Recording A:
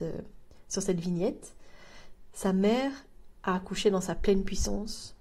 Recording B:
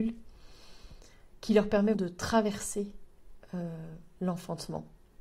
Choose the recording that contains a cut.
B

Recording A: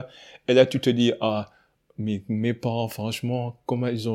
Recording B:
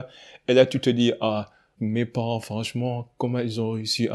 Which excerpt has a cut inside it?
B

